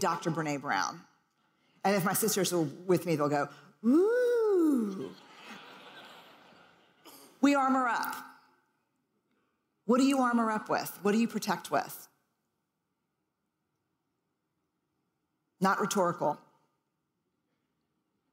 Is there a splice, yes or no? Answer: no